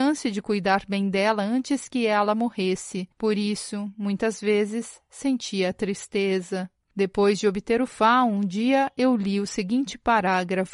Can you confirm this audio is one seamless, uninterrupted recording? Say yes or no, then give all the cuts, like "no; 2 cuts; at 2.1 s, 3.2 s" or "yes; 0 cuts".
yes; 0 cuts